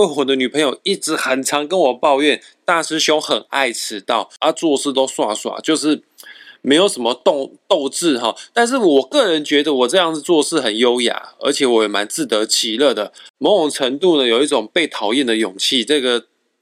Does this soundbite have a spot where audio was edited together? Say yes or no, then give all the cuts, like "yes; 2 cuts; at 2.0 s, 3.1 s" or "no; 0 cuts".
no; 0 cuts